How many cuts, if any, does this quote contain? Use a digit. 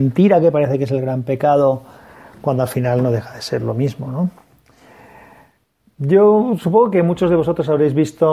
0